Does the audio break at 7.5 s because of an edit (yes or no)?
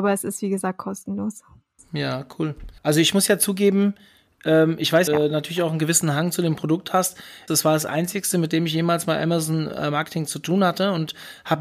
yes